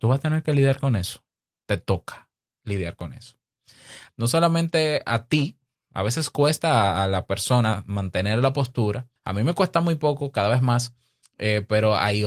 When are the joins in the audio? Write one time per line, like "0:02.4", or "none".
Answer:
0:04.1
0:09.2